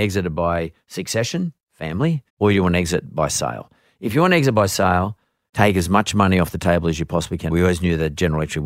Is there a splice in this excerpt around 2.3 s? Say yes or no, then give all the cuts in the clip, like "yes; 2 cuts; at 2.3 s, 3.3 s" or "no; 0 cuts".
yes; 3 cuts; at 2.3 s, 5.5 s, 7.5 s